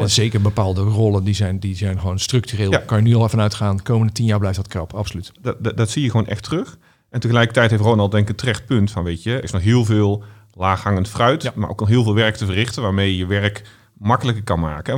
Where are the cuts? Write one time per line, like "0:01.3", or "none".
0:05.7
0:09.4